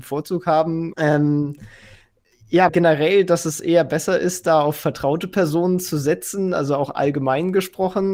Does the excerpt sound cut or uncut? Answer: cut